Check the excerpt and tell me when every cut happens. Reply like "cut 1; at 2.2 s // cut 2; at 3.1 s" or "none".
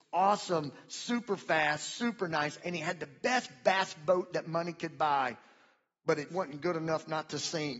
cut 1; at 2.6 s // cut 2; at 6.3 s